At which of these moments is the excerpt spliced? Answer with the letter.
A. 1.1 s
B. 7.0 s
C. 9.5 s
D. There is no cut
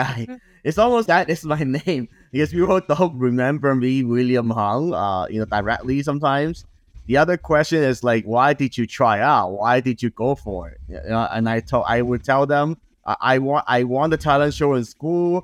A